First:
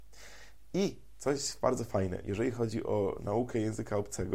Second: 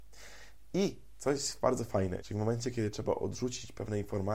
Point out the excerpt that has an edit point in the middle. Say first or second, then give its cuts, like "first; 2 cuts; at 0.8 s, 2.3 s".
second; 1 cut; at 2.2 s